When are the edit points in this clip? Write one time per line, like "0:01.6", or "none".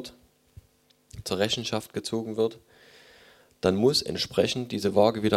0:01.2